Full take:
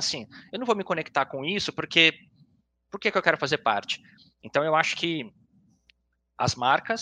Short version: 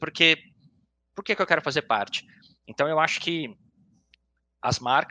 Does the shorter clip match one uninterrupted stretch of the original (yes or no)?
yes